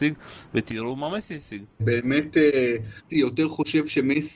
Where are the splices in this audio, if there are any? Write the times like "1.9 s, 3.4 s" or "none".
1.8 s, 3.1 s